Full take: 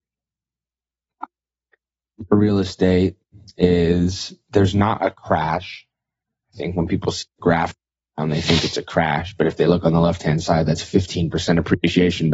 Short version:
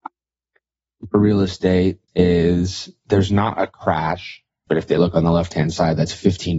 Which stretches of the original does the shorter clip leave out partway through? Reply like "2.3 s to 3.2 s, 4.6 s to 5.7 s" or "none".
3.3 s to 3.5 s, 6.1 s to 9.4 s